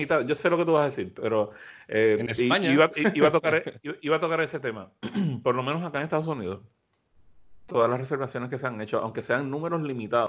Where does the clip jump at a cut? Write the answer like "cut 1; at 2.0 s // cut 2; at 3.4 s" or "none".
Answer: none